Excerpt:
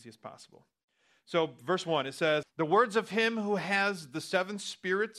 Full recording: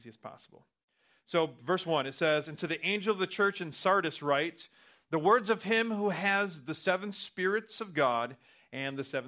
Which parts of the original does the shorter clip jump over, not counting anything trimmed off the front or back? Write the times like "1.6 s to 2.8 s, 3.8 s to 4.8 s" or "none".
2.4 s to 5.0 s